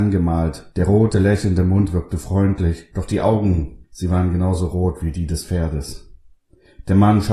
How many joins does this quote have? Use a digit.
1